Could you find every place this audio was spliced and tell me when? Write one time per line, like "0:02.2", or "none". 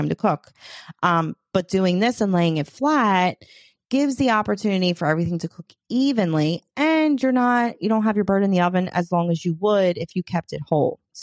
none